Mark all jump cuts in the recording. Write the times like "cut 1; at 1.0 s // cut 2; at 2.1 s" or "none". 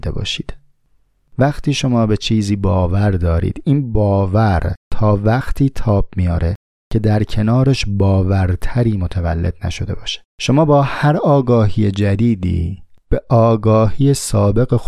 cut 1; at 10.3 s